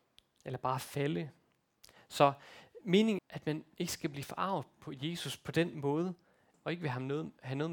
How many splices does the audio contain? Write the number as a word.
two